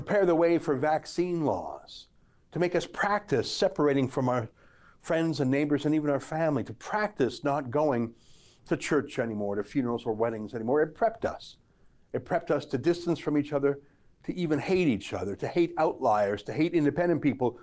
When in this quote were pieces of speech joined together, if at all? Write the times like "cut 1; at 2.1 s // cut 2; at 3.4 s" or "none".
none